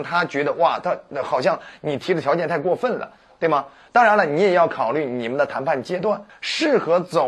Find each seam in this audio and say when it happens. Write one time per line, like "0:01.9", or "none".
0:06.3